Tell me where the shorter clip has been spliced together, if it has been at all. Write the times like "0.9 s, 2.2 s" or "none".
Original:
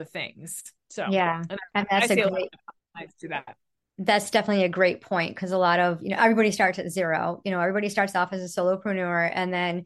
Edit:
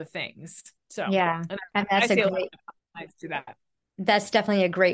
none